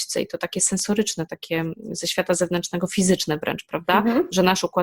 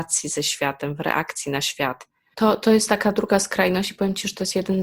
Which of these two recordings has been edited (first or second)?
second